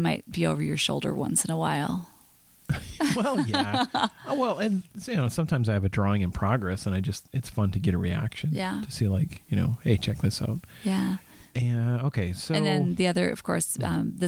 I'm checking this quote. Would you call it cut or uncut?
uncut